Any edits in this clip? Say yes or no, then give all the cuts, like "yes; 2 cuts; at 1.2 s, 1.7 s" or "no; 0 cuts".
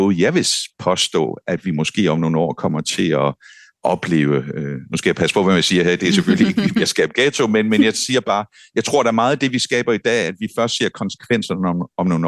no; 0 cuts